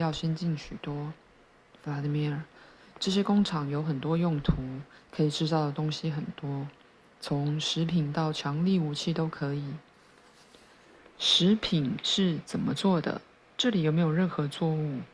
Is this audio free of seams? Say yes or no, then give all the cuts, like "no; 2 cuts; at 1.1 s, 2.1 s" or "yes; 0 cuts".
yes; 0 cuts